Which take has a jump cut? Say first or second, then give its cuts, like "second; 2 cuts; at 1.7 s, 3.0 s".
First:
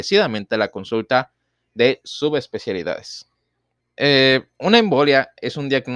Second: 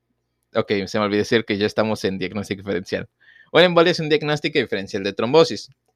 first; 1 cut; at 3.8 s